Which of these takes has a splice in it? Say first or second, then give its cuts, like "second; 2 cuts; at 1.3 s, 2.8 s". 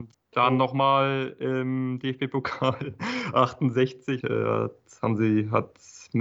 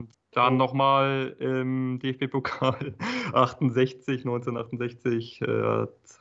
first; 1 cut; at 4.2 s